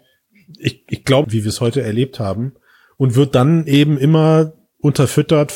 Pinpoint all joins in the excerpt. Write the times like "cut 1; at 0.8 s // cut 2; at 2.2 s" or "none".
cut 1; at 1.2 s